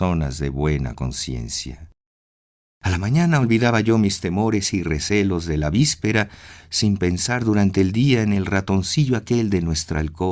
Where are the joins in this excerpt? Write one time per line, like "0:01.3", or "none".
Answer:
none